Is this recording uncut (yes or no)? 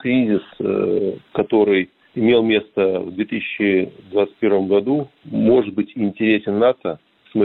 yes